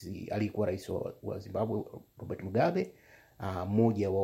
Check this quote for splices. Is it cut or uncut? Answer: uncut